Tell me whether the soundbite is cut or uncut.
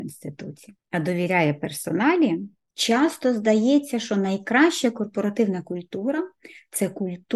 uncut